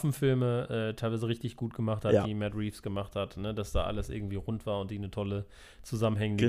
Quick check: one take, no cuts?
yes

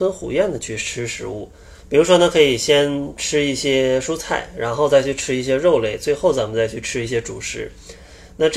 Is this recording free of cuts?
no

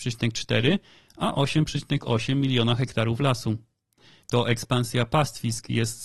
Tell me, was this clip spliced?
yes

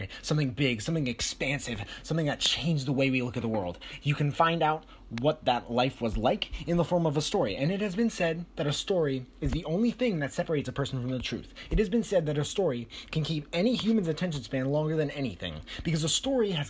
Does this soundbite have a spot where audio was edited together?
no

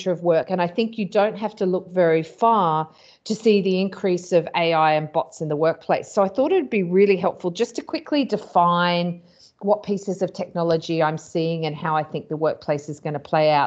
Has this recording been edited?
no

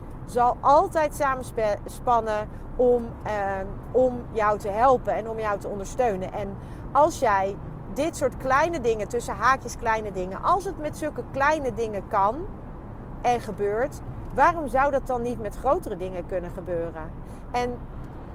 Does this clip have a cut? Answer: no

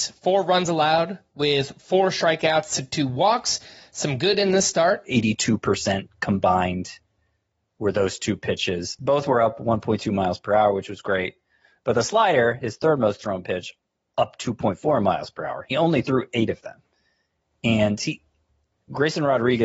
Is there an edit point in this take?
yes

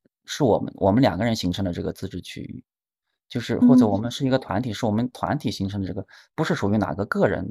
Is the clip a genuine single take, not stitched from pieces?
yes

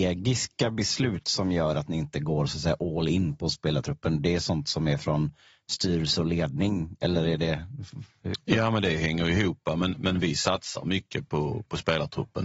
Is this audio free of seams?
yes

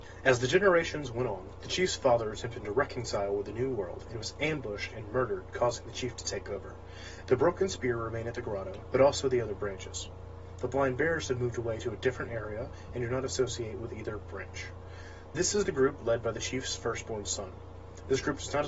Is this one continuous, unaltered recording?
no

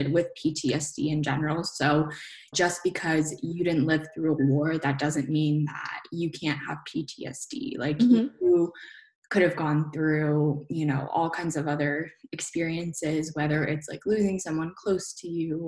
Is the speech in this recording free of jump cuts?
no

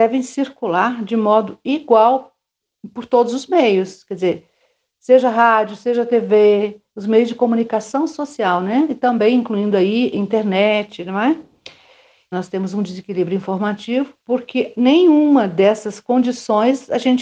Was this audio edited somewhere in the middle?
yes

